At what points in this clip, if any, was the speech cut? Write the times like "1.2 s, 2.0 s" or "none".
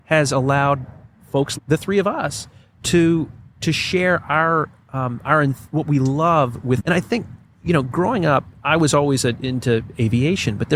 1.6 s, 6.8 s